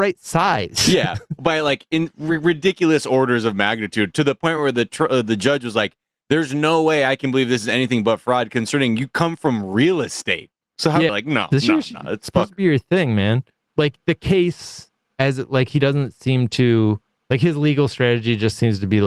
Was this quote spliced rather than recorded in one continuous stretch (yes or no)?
yes